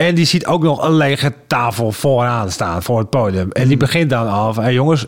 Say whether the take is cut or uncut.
uncut